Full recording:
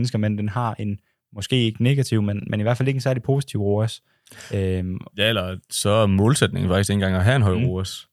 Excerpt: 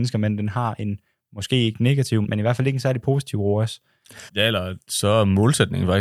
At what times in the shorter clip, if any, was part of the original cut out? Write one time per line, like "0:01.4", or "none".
0:02.2
0:04.3